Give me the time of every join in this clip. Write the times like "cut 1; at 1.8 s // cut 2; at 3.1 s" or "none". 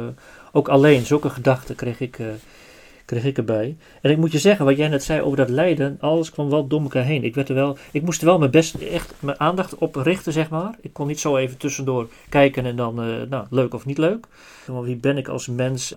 cut 1; at 6.0 s // cut 2; at 14.7 s